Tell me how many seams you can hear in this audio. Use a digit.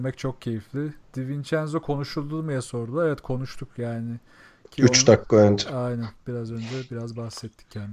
0